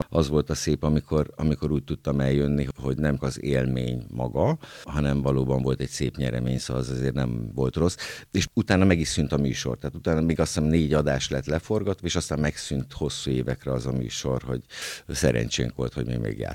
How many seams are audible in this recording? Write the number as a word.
one